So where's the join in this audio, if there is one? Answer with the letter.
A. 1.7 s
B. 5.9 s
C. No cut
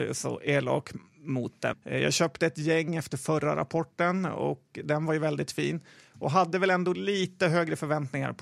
A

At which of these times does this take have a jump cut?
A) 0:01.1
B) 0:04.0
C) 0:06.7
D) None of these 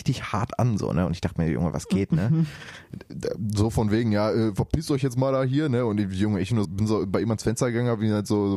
C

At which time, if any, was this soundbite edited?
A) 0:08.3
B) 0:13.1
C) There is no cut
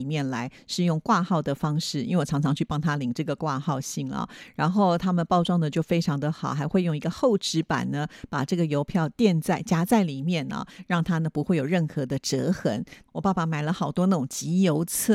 C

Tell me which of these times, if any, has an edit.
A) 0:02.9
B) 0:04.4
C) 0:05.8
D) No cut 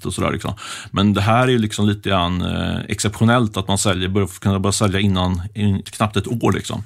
C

